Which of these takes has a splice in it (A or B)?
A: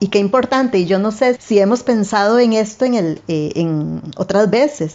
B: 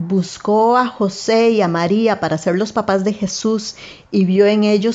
A